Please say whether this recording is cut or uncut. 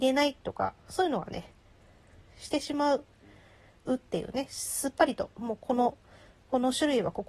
uncut